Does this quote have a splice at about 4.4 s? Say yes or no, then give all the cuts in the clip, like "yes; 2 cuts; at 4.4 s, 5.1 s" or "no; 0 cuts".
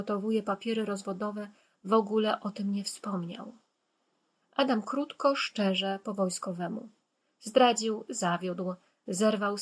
yes; 1 cut; at 4.4 s